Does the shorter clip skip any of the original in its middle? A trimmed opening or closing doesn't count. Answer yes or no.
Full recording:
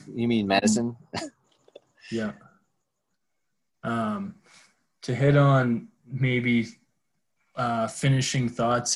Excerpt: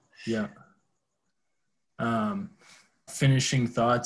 yes